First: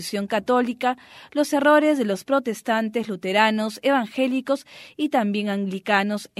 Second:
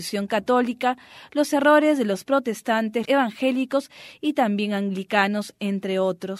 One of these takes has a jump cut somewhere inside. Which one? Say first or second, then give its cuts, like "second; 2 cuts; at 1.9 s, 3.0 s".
second; 1 cut; at 3.1 s